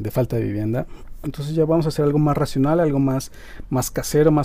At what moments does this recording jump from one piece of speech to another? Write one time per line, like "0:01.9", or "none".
0:01.2